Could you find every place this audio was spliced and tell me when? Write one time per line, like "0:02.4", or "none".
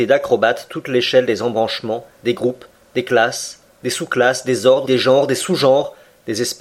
0:04.8

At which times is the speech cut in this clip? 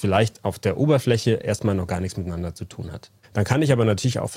0:03.2

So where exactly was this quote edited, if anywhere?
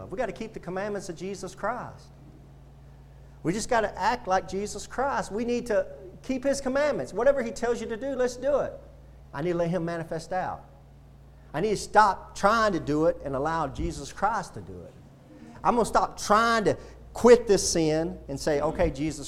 0:09.2

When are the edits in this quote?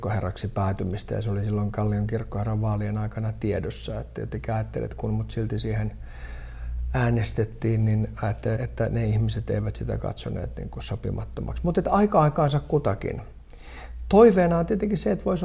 0:08.6

